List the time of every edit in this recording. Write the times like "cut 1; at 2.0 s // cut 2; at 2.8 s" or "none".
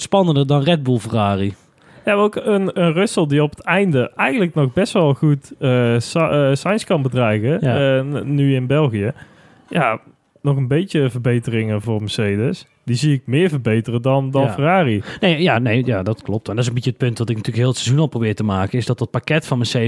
cut 1; at 11.8 s